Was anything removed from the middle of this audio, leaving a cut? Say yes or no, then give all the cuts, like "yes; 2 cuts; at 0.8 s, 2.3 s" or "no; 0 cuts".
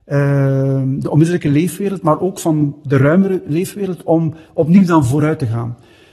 no; 0 cuts